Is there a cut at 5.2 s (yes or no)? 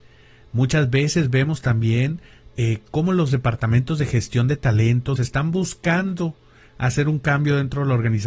yes